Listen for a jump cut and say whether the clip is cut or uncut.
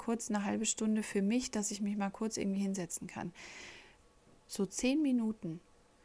cut